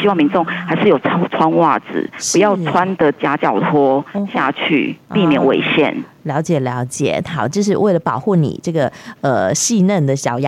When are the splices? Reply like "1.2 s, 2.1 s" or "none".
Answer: none